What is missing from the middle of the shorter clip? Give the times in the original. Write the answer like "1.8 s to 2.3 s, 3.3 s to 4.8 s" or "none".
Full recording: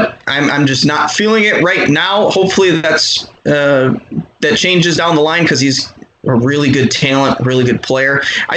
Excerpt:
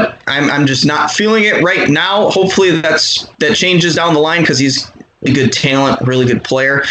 3.3 s to 4.4 s, 6.3 s to 6.6 s